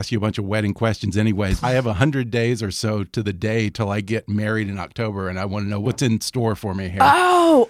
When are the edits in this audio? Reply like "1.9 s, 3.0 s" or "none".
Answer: 1.6 s